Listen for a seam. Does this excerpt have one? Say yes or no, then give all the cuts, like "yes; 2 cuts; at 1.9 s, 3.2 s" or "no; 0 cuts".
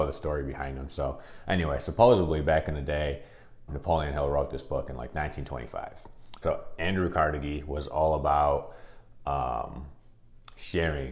yes; 2 cuts; at 3.7 s, 6.4 s